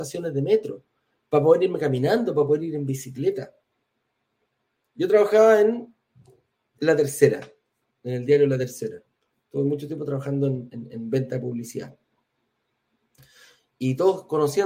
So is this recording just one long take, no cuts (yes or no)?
yes